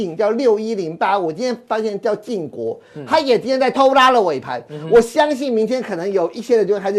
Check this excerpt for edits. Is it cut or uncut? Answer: cut